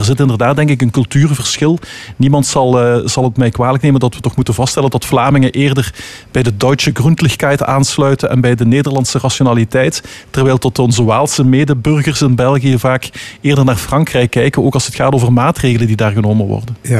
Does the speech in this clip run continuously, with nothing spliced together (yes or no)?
yes